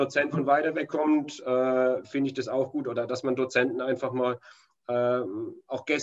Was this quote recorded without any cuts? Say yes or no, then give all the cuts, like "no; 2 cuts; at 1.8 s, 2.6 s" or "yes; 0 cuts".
yes; 0 cuts